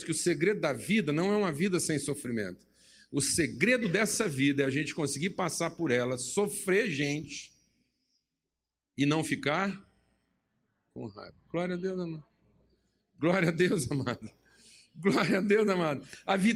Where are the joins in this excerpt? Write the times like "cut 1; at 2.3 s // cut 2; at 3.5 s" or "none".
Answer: none